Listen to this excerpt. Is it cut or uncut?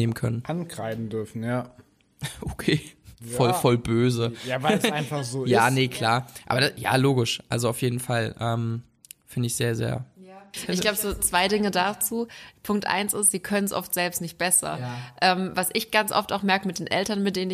uncut